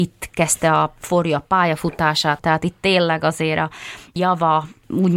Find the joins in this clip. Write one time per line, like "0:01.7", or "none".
0:02.4